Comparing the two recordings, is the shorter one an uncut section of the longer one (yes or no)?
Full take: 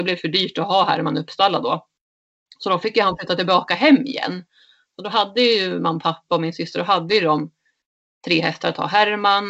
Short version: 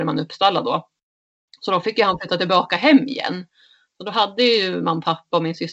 yes